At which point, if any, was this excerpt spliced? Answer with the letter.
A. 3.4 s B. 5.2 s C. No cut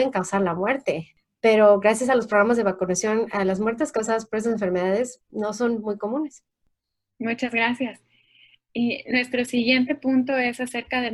B